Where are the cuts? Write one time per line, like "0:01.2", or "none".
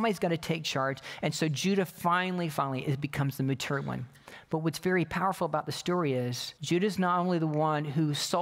0:02.5
0:06.6